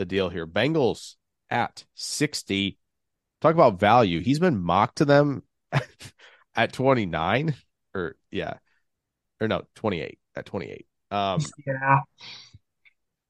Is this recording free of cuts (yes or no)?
yes